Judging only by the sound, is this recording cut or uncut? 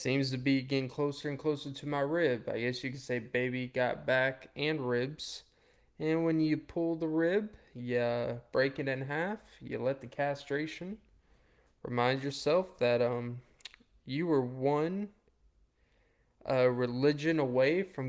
uncut